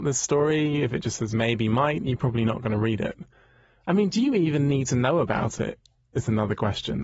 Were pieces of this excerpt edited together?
no; 0 cuts

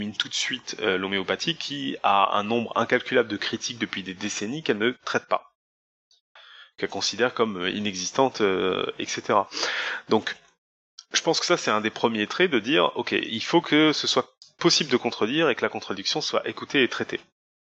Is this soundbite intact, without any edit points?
yes; 0 cuts

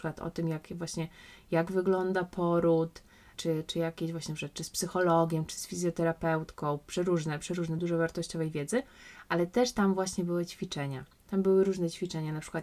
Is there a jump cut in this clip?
no; 0 cuts

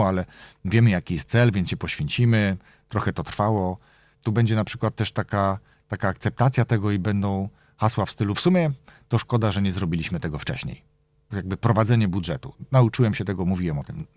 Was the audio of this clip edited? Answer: yes; 2 cuts; at 4.1 s, 11.3 s

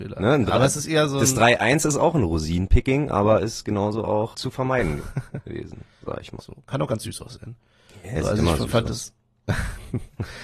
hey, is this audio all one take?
no; 2 cuts; at 4.3 s, 6.4 s

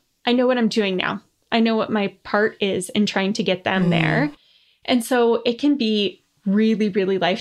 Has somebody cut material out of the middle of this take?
no; 0 cuts

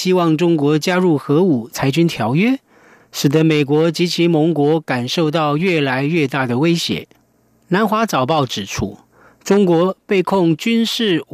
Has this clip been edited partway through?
yes; 1 cut; at 3.0 s

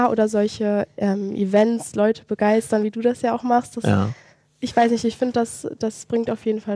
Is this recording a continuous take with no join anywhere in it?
yes; 0 cuts

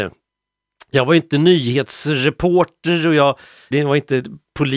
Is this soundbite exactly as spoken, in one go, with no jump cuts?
no; 1 cut; at 3.7 s

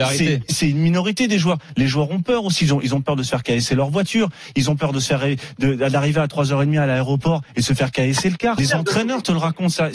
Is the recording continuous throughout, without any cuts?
no; 1 cut; at 8.6 s

